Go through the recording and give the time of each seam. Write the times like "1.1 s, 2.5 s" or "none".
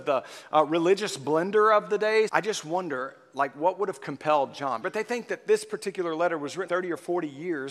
2.3 s, 4.8 s, 6.7 s